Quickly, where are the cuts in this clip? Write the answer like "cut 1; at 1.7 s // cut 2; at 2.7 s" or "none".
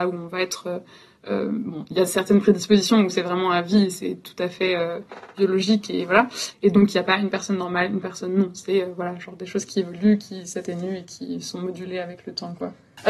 none